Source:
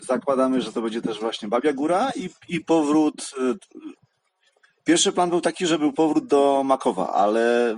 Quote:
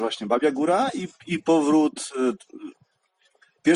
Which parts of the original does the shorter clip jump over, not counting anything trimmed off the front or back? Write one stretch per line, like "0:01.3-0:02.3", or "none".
none